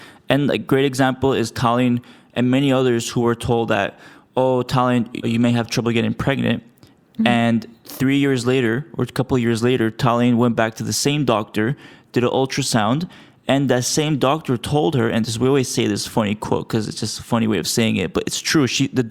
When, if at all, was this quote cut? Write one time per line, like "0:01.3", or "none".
0:05.2